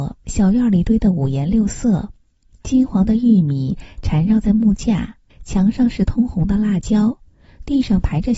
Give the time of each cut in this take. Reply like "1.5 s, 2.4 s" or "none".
5.3 s